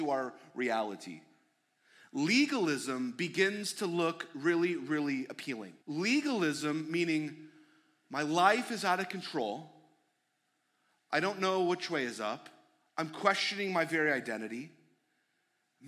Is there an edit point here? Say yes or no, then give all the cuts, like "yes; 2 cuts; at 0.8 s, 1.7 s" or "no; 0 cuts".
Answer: yes; 1 cut; at 5.8 s